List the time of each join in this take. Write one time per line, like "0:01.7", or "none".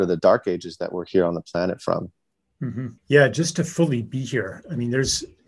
0:03.0